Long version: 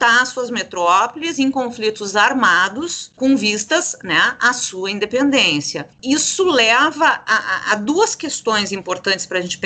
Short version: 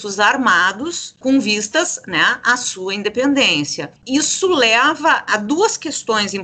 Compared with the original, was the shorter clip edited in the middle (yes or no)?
yes